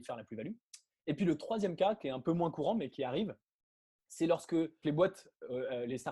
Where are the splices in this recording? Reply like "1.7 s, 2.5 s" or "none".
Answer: 4.8 s